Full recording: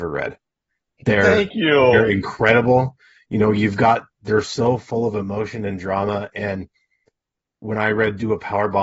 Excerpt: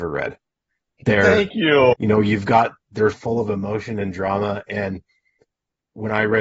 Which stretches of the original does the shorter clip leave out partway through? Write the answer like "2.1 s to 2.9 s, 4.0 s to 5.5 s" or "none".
1.9 s to 3.2 s, 4.4 s to 4.8 s